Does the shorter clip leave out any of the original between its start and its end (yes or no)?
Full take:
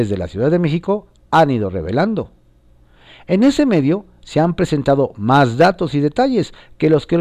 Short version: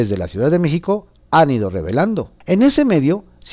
yes